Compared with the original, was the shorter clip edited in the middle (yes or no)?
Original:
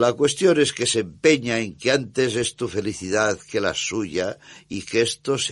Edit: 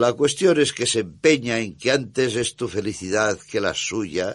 no